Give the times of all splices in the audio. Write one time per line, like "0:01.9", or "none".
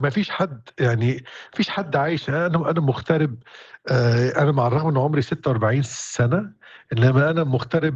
none